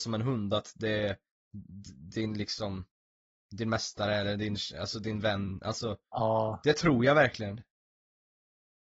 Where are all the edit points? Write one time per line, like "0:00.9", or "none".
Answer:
none